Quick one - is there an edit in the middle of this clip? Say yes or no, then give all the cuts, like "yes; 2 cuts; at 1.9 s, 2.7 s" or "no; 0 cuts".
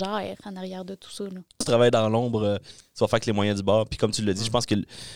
yes; 1 cut; at 1.6 s